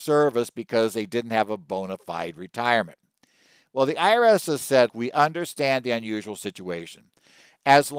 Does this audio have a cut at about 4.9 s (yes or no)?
yes